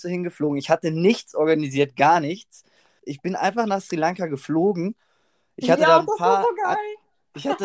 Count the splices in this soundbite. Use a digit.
1